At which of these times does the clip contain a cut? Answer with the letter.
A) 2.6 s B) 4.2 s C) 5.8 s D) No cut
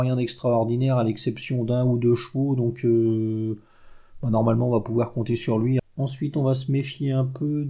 C